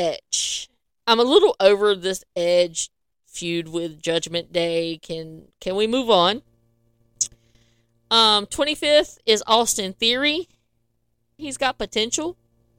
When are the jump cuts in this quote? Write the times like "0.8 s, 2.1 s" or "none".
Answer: 11.4 s